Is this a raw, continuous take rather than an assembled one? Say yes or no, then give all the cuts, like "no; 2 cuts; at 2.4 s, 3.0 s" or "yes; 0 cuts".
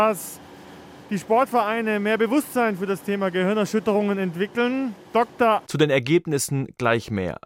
no; 1 cut; at 5.6 s